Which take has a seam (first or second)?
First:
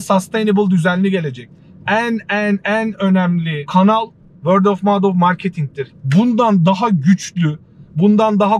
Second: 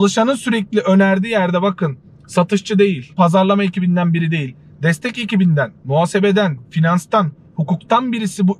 first